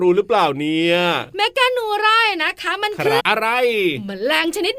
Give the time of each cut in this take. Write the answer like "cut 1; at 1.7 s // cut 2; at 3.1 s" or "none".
cut 1; at 3.2 s